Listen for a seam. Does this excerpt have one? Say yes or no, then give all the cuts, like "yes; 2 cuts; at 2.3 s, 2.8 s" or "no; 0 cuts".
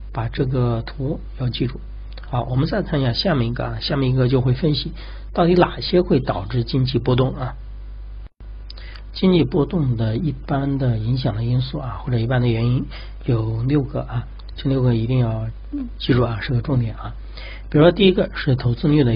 no; 0 cuts